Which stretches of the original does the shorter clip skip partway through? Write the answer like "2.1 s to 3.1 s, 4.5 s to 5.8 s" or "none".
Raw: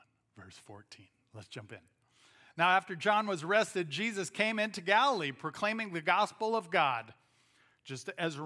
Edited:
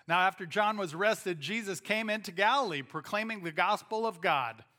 none